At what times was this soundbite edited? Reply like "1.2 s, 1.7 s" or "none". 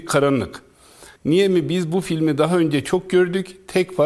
1.2 s